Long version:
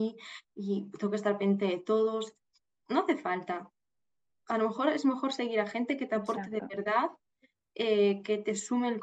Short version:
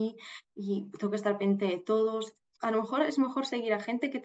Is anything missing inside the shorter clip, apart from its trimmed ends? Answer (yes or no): yes